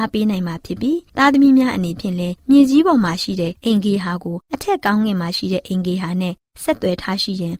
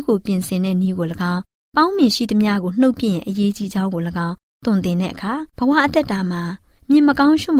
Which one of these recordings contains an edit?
second; 1 cut; at 5.5 s

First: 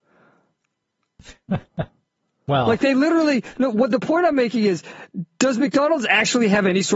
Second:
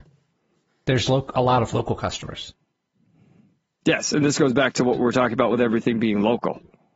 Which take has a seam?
second; 1 cut; at 1.1 s

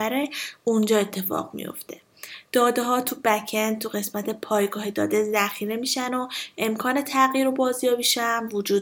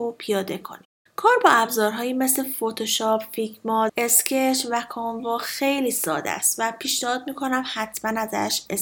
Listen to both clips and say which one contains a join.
second; 1 cut; at 3.9 s

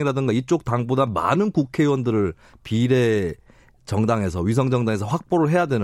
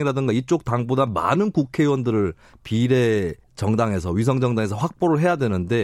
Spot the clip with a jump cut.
second; 1 cut; at 3.4 s

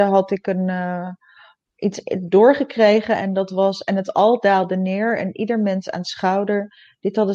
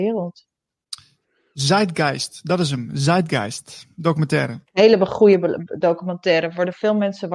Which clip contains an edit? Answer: second; 1 cut; at 4.6 s

